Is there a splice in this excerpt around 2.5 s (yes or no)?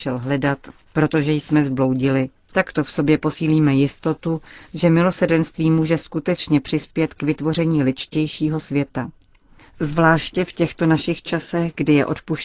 yes